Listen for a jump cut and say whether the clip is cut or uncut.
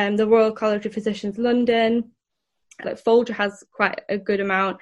cut